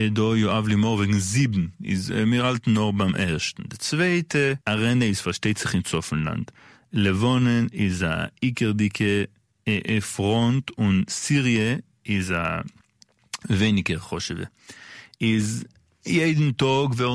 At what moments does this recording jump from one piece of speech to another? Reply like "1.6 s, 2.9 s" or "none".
4.6 s